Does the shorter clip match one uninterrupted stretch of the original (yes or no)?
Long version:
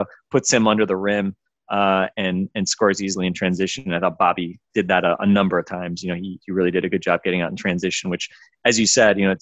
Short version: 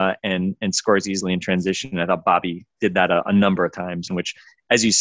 no